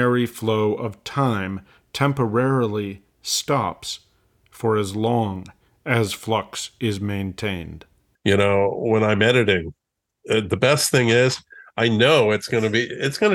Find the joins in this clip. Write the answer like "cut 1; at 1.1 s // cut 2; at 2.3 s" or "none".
cut 1; at 8.2 s